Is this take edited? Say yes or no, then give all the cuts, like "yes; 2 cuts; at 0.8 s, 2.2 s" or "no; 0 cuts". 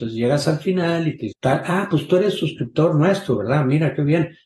yes; 1 cut; at 1.3 s